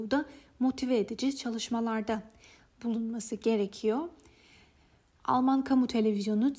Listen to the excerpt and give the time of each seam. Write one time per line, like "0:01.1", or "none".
0:05.2